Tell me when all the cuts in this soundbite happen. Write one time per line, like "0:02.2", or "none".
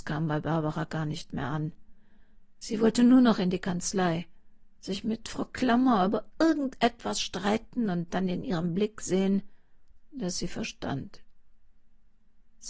none

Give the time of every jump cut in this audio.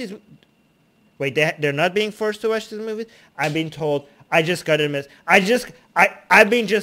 none

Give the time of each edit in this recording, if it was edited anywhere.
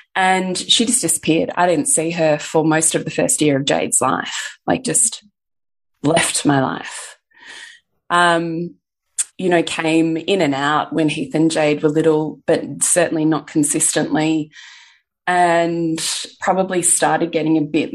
0:09.3

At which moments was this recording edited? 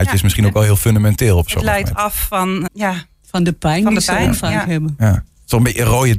0:02.7

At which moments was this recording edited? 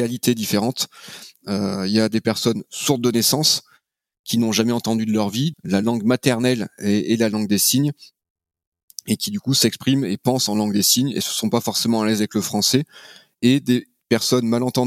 0:05.5

